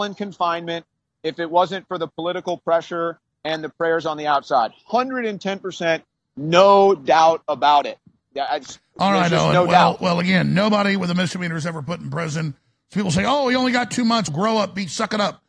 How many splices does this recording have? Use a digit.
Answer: 1